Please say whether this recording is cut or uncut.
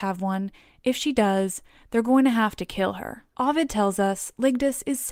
cut